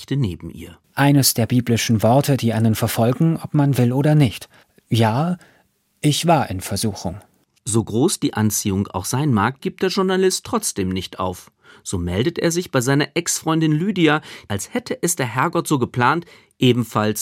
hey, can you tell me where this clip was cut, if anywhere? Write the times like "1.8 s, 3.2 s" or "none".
0.9 s, 9.6 s, 14.5 s